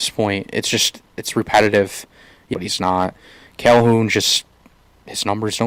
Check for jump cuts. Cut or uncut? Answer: cut